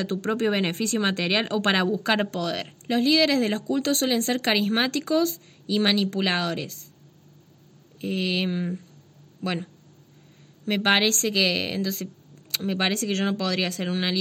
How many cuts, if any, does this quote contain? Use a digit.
1